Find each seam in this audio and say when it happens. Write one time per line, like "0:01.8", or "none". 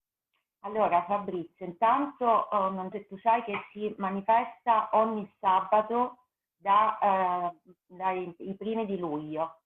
0:02.9